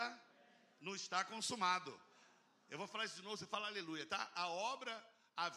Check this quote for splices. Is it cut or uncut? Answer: uncut